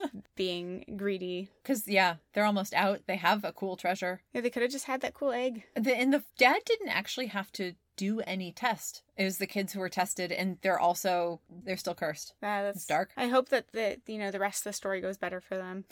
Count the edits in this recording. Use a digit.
1